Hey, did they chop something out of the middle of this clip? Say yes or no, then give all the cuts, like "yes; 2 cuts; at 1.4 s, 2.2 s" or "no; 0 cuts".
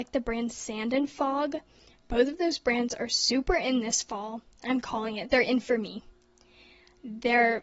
no; 0 cuts